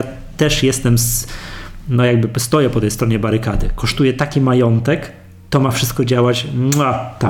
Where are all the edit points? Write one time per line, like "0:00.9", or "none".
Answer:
none